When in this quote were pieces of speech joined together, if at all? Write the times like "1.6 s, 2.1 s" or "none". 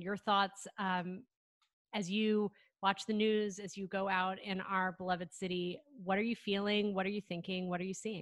none